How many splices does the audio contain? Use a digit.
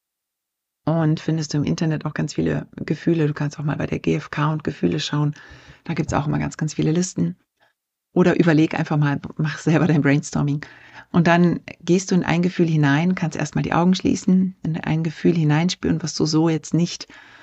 0